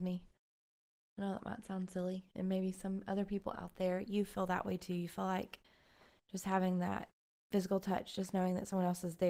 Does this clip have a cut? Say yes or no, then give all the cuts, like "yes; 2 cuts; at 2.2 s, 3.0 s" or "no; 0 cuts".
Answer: no; 0 cuts